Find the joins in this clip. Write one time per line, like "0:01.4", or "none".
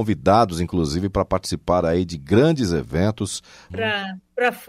0:03.7